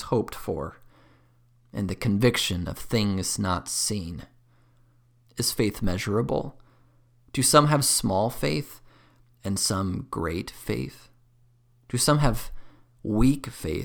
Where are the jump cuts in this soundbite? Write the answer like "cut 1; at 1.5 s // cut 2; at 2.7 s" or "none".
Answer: cut 1; at 5.2 s

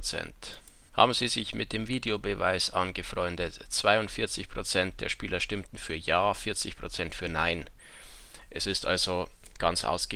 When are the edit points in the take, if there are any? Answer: none

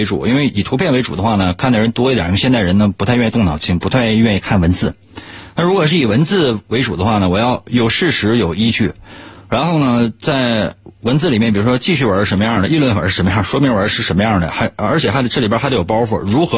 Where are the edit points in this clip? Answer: none

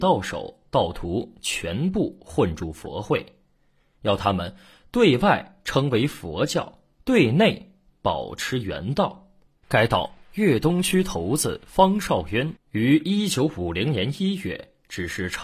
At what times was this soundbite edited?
cut 1; at 9.5 s

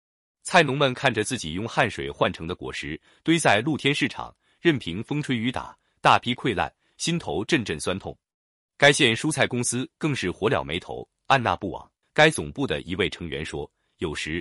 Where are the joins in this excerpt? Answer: cut 1; at 12.0 s

